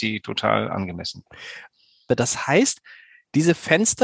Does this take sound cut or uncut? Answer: cut